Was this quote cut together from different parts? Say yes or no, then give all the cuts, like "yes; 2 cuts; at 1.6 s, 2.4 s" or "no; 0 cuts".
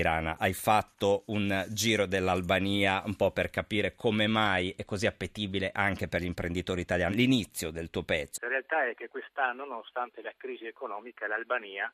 yes; 2 cuts; at 7.1 s, 8.3 s